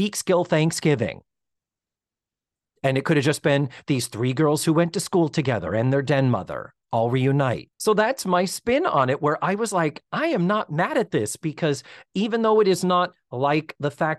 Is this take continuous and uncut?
no; 1 cut; at 7.7 s

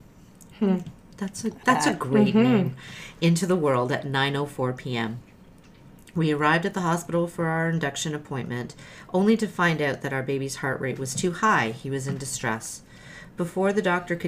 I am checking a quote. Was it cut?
yes; 1 cut; at 1.6 s

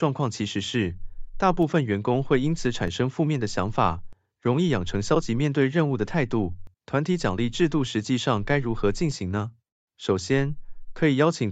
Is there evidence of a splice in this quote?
yes; 1 cut; at 6.7 s

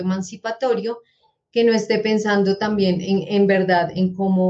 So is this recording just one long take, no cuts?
yes; 0 cuts

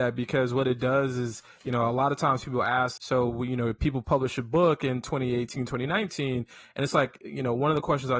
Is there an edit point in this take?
yes; 1 cut; at 3.0 s

